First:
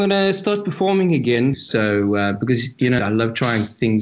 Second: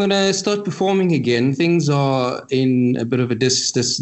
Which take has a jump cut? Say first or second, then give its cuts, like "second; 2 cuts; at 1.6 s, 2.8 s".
first; 2 cuts; at 1.5 s, 3.0 s